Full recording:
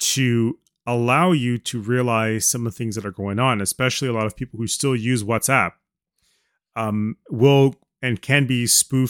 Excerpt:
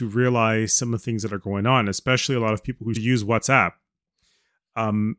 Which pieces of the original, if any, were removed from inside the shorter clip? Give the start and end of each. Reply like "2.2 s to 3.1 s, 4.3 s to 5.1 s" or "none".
4.7 s to 5.0 s